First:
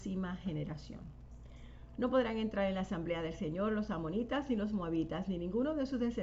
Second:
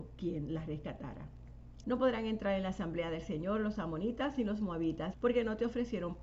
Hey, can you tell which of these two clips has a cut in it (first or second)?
second